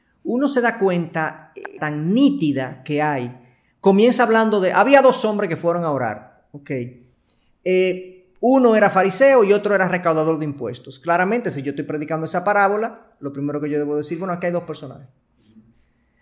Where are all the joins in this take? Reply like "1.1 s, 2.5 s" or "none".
1.8 s